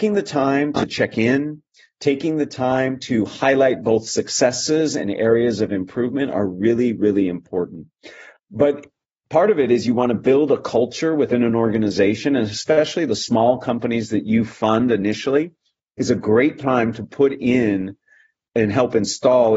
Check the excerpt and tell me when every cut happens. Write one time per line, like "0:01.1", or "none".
0:08.4